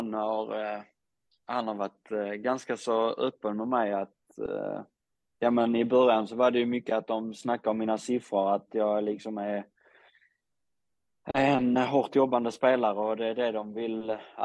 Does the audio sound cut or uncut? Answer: uncut